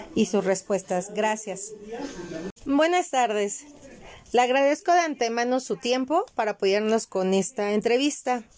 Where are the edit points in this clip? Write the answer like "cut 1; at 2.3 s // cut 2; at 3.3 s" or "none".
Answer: cut 1; at 2.6 s